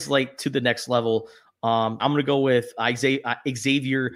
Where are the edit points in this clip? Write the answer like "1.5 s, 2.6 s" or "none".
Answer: 2.0 s